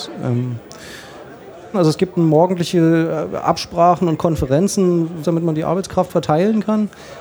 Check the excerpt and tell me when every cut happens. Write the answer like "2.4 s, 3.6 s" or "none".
1.7 s, 5.2 s